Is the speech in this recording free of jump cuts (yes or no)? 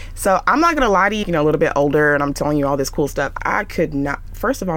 no